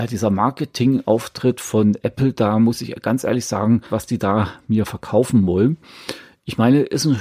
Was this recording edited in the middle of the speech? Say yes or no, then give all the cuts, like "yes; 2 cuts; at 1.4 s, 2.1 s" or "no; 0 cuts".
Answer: yes; 1 cut; at 3.9 s